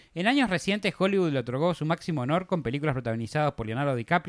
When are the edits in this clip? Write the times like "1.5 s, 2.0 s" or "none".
none